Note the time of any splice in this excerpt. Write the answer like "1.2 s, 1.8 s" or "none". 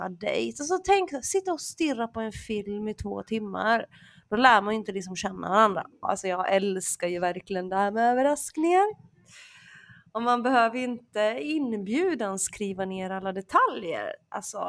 6.0 s